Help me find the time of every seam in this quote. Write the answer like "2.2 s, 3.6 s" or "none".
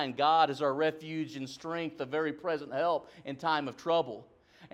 none

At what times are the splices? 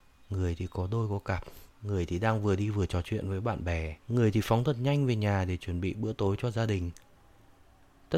1.7 s, 4.0 s

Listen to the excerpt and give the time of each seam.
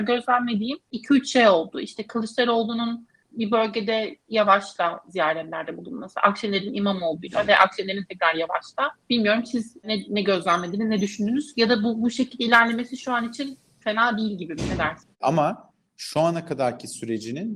9.0 s, 15.1 s

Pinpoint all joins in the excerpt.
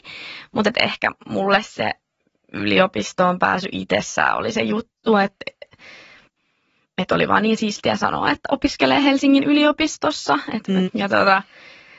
10.8 s

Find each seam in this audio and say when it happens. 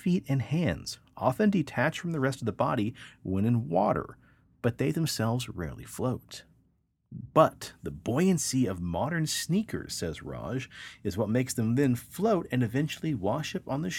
none

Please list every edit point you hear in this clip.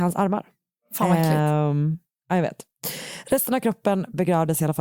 none

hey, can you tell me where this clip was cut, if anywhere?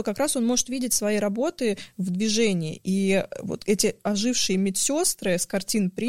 none

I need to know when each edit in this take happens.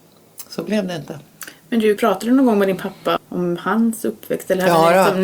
2.0 s, 3.2 s

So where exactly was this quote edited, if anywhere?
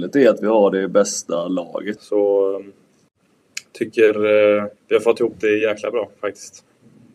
2.0 s, 4.8 s

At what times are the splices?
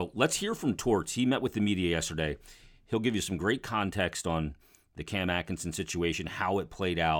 none

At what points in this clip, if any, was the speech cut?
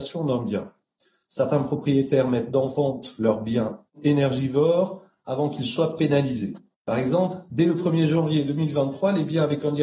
none

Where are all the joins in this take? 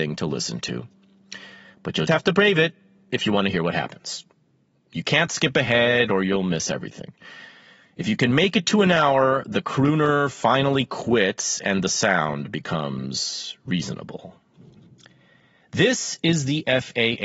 2.1 s

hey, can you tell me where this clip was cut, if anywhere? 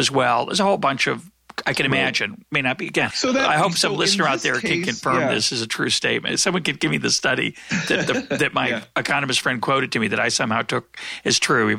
3.1 s

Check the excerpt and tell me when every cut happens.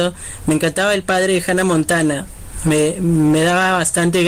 none

